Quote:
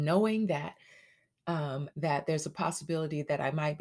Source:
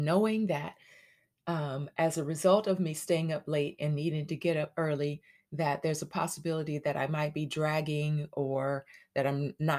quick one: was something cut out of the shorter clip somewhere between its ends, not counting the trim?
yes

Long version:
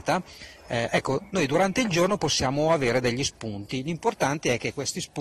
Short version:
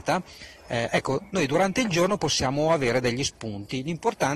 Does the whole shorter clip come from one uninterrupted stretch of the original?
yes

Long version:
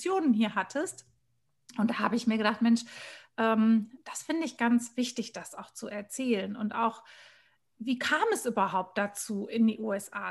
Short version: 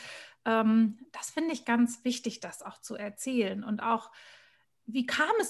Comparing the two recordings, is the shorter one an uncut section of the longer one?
yes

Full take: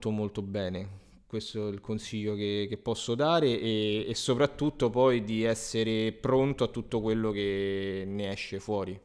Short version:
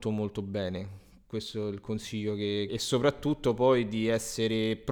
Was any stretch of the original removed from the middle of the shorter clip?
yes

